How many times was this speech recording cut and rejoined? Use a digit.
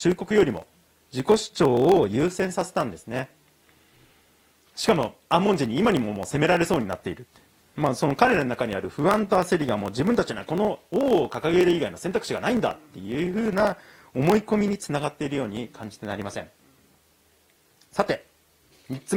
0